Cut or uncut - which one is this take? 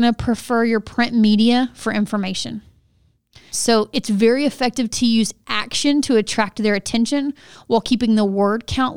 cut